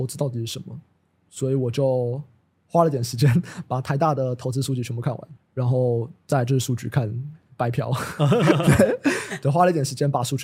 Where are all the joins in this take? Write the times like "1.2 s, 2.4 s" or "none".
5.4 s